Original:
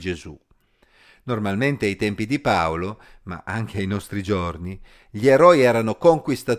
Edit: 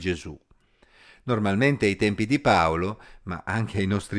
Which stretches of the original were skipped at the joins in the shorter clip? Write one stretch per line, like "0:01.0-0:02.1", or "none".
none